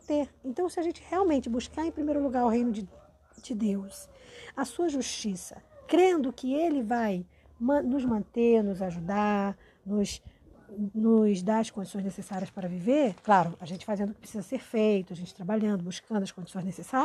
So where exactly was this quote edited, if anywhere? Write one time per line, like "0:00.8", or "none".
0:13.2